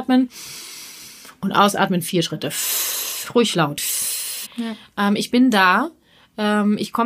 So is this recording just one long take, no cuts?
no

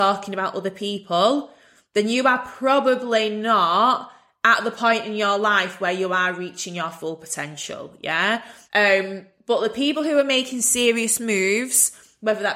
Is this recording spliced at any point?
yes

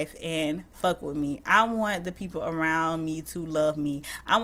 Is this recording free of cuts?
yes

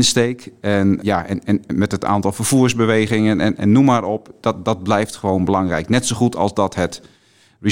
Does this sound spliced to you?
yes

